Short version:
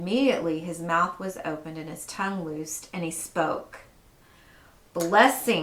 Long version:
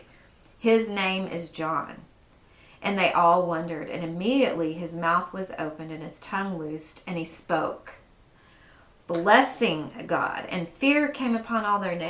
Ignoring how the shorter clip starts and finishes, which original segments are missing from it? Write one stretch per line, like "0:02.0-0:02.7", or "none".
none